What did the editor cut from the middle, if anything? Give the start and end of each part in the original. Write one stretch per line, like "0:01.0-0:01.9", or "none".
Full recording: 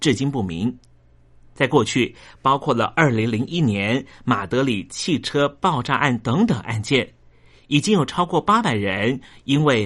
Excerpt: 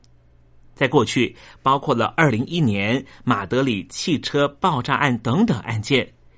0:03.1-0:03.3